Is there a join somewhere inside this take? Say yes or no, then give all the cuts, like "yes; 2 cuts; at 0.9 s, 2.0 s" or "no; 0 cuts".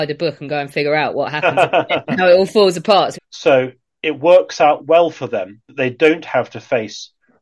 yes; 1 cut; at 3.1 s